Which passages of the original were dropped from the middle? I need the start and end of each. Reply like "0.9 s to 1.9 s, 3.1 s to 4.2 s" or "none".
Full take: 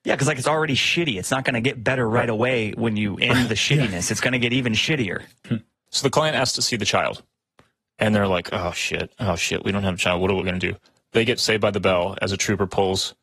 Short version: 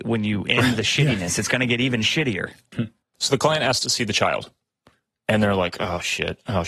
none